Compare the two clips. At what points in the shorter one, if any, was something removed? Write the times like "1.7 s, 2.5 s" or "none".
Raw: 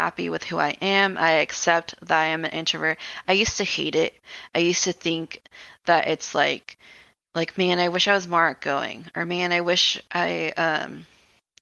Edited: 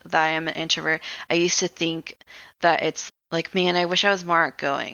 1.3 s, 3.1 s